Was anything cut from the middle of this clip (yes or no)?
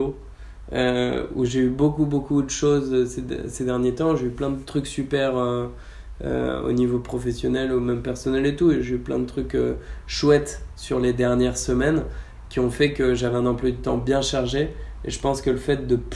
no